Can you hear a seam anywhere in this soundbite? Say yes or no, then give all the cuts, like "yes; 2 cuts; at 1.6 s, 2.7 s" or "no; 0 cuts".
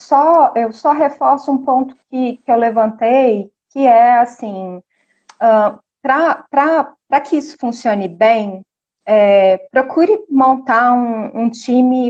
no; 0 cuts